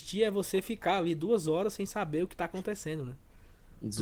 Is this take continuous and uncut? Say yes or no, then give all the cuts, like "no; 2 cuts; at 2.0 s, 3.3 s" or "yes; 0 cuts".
yes; 0 cuts